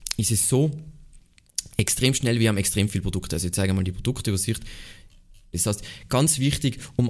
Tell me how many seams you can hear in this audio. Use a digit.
1